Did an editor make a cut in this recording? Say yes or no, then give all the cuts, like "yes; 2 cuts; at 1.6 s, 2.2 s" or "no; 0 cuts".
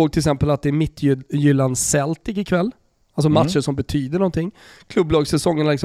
no; 0 cuts